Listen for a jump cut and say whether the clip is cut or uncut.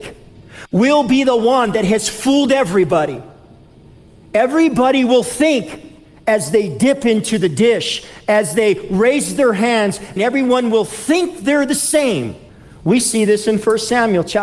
cut